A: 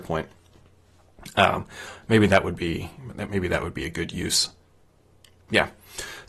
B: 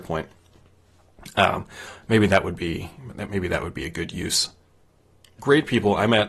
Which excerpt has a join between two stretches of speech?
B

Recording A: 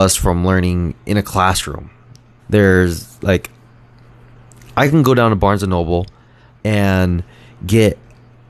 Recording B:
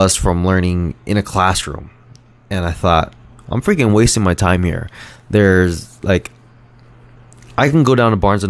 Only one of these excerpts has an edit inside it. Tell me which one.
A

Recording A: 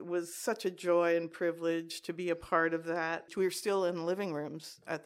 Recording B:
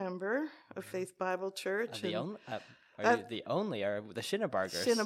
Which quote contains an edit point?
A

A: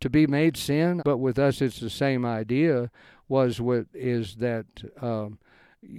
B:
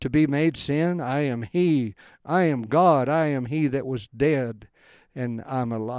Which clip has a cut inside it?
A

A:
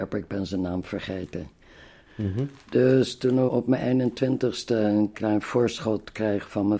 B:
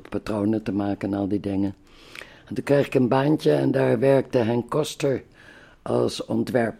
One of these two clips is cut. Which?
A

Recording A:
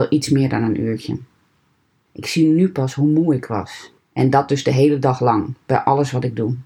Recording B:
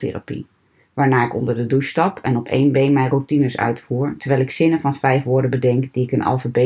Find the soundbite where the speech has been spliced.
A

